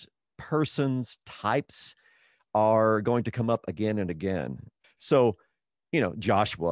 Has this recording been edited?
yes; 1 cut; at 4.8 s

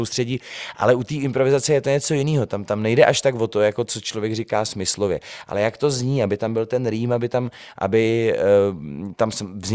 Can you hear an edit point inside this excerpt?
no; 0 cuts

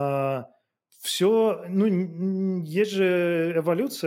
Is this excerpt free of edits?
yes; 0 cuts

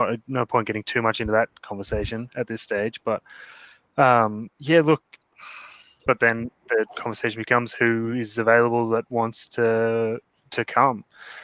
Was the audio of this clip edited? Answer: yes; 1 cut; at 6.1 s

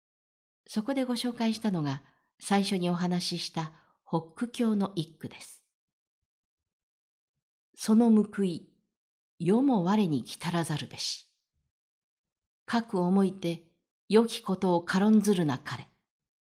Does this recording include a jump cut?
no; 0 cuts

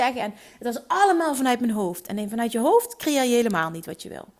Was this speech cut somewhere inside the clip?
no; 0 cuts

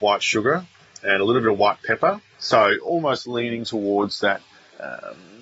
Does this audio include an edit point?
no; 0 cuts

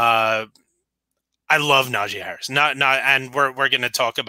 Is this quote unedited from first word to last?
yes; 0 cuts

